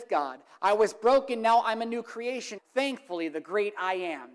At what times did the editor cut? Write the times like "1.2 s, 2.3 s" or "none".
2.6 s